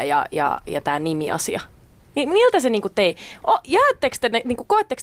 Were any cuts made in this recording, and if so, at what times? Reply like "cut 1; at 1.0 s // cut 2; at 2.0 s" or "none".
none